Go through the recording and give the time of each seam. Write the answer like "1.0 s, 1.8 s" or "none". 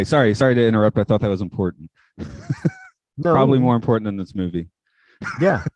none